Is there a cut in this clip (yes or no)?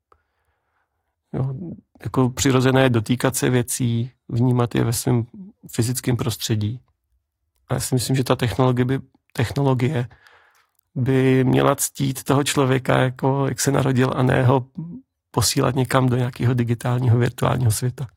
no